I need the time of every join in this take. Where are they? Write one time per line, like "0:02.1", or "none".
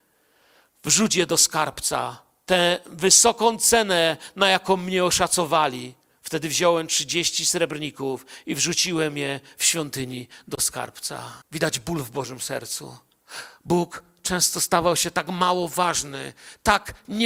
0:11.4